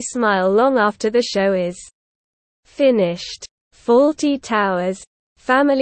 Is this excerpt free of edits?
yes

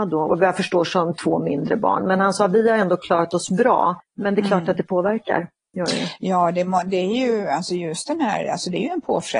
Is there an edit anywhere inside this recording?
no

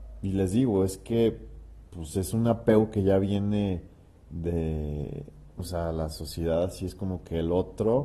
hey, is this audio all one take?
no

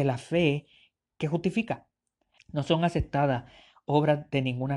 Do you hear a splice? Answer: yes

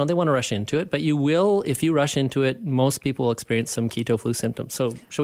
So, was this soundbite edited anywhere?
no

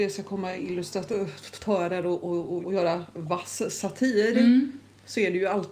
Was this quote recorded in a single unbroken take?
no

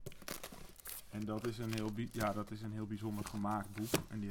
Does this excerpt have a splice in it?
no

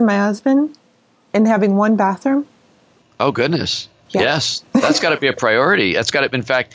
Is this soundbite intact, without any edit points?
yes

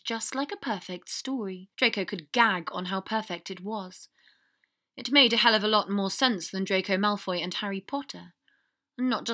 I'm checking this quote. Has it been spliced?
yes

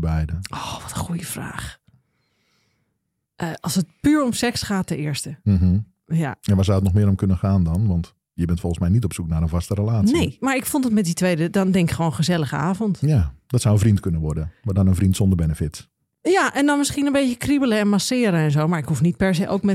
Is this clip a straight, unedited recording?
yes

